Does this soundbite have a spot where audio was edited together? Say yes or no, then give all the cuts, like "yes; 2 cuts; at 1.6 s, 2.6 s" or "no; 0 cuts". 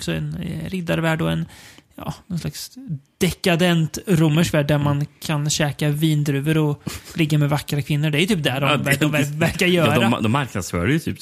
no; 0 cuts